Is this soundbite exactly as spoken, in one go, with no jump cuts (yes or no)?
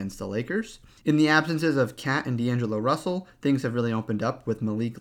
no